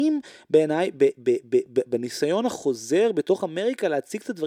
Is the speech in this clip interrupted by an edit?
yes; 1 cut; at 1.7 s

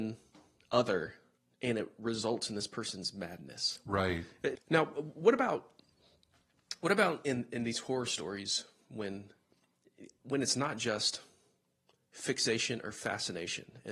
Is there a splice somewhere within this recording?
yes; 1 cut; at 4.6 s

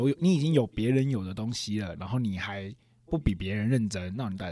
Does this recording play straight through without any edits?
yes; 0 cuts

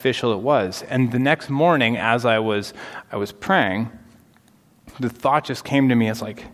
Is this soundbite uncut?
yes; 0 cuts

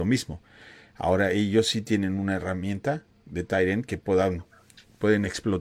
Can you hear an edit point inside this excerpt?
no; 0 cuts

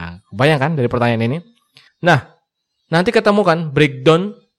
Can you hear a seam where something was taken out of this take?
yes; 1 cut; at 1.9 s

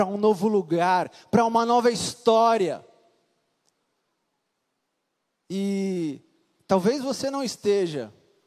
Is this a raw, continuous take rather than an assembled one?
yes; 0 cuts

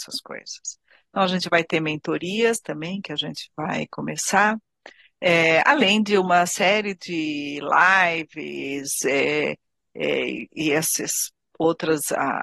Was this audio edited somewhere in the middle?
no; 0 cuts

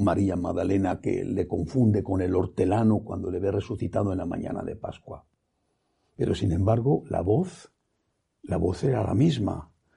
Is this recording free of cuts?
yes; 0 cuts

